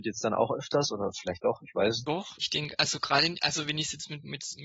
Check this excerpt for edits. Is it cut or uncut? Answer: uncut